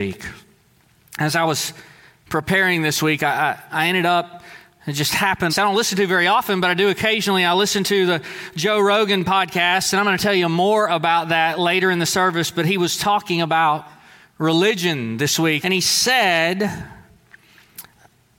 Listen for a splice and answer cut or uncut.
cut